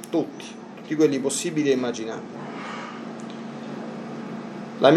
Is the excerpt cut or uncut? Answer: uncut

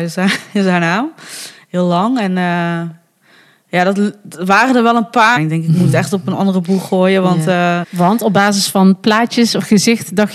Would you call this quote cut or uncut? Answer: cut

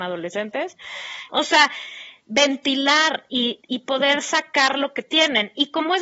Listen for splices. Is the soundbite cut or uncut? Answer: cut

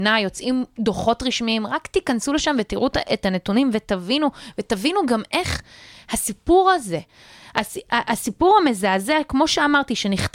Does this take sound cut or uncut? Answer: uncut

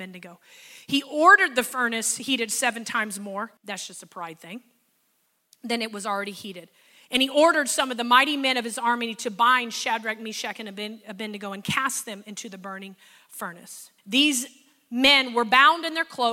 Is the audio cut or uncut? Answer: cut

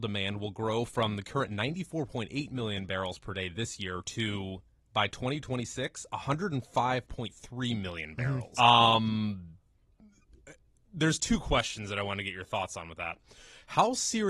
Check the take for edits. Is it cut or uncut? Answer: cut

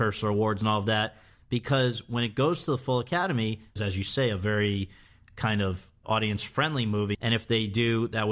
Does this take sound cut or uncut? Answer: cut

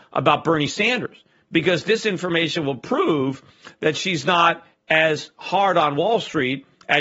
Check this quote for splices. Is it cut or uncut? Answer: uncut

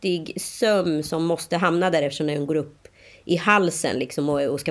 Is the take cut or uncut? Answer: uncut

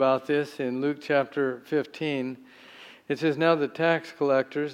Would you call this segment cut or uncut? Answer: uncut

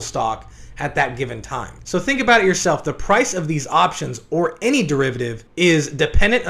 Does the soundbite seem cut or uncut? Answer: cut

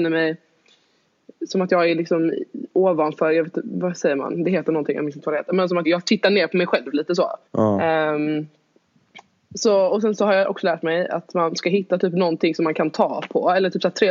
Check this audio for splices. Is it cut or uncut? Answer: cut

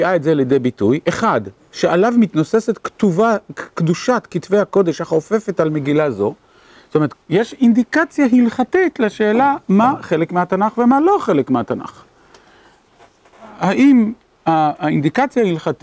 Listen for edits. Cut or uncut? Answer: cut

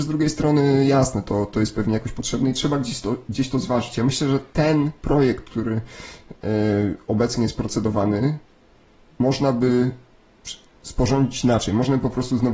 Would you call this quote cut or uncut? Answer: uncut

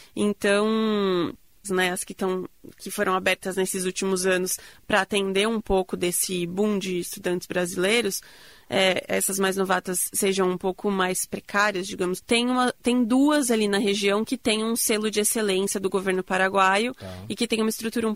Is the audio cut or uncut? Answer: cut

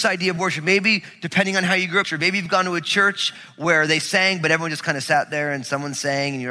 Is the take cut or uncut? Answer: cut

